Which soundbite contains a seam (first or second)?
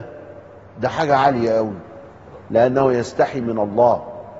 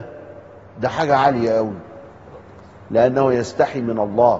first